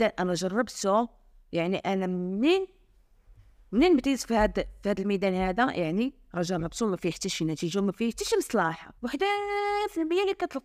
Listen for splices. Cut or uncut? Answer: cut